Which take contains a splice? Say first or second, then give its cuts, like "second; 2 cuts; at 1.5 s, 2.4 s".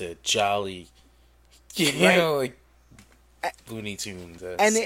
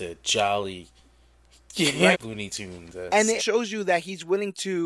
second; 2 cuts; at 2.1 s, 3.4 s